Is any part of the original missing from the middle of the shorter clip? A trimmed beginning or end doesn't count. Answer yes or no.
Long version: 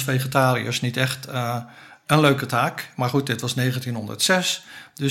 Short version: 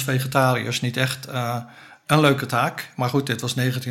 no